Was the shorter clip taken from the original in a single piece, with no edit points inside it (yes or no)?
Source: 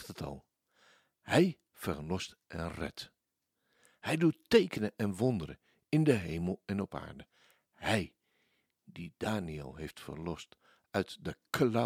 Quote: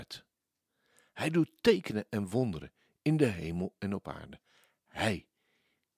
yes